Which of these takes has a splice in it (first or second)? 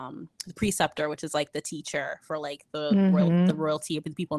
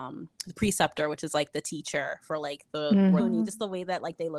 second